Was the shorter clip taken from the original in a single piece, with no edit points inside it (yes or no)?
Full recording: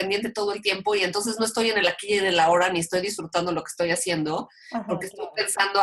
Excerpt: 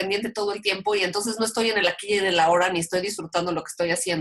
yes